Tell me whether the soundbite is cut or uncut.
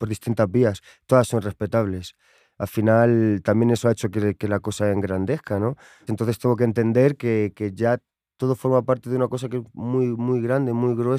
cut